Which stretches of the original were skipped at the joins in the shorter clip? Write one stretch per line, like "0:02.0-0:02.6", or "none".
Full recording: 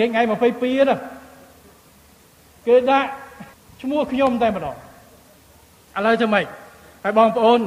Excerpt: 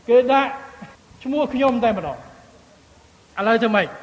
none